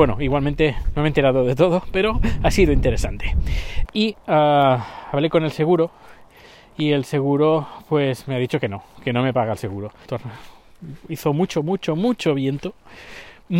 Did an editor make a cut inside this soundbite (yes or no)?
yes